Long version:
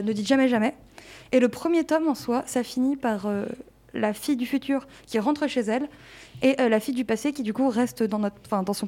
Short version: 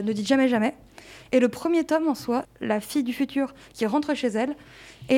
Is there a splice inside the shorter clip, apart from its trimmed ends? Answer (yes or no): yes